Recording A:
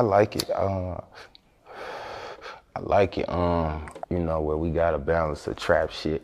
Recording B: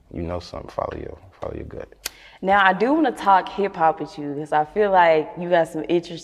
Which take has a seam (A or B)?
A